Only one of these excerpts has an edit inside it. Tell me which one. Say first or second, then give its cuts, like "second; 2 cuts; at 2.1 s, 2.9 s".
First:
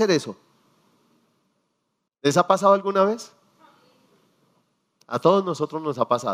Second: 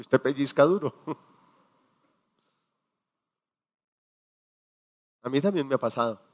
first; 1 cut; at 2.1 s